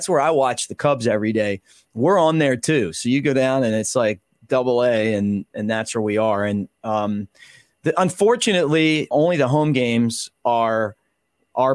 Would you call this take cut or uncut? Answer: cut